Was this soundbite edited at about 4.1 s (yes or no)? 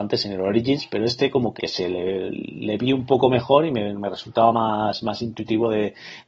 no